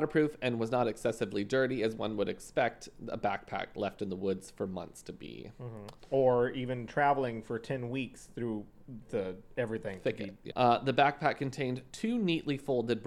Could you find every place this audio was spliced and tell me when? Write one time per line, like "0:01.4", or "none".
0:10.5

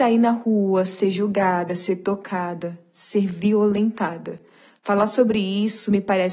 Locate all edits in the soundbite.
none

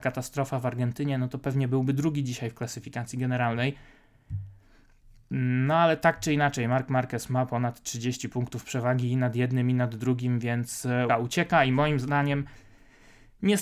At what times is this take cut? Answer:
0:11.1

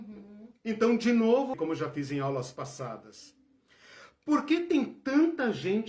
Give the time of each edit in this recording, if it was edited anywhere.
0:01.5

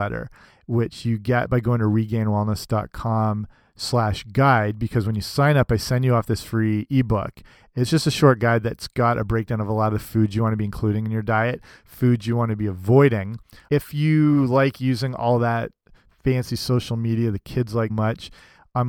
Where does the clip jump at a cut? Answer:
0:13.7
0:17.9

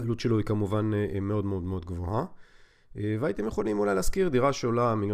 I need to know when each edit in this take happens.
none

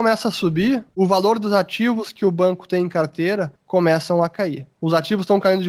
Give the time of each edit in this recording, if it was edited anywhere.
0:04.8

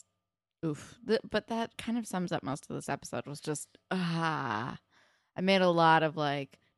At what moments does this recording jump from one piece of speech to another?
none

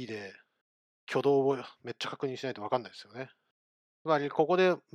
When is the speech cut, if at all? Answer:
0:03.9

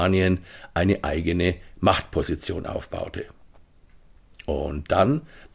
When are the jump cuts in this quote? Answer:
none

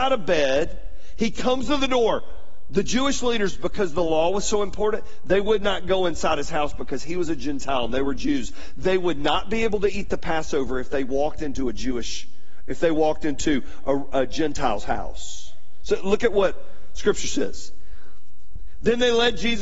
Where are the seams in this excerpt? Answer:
none

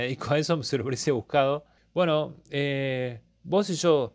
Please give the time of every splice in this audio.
0:01.8

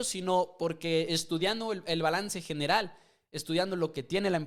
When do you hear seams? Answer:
none

